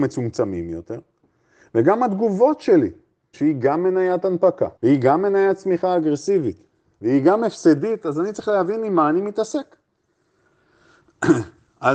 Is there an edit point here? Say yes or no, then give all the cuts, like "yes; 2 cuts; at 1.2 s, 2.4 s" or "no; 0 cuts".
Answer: yes; 2 cuts; at 3.3 s, 4.8 s